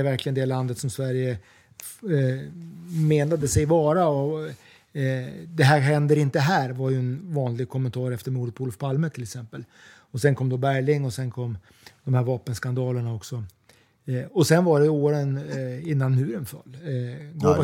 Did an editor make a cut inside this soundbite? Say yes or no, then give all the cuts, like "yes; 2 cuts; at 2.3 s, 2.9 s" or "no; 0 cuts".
no; 0 cuts